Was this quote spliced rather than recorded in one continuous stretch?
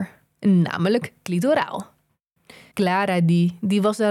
yes; 1 cut; at 2.7 s

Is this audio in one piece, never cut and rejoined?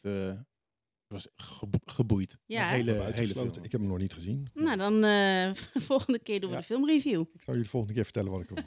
yes; 0 cuts

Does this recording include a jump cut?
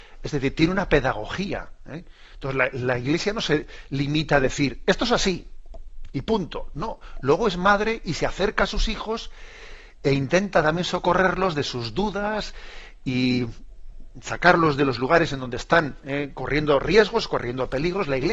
no; 0 cuts

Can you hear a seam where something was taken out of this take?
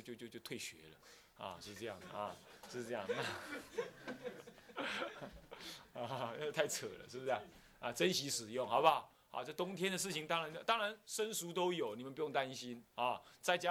no; 0 cuts

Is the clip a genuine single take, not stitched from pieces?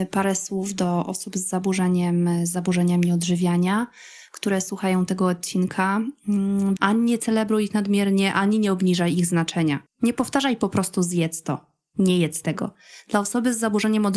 no; 2 cuts; at 6.8 s, 9.9 s

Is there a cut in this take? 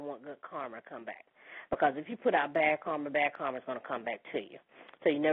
no; 0 cuts

